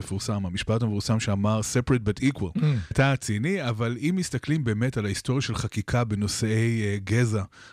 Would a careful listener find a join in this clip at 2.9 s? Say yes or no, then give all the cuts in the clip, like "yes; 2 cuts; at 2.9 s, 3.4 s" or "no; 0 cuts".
yes; 1 cut; at 2.9 s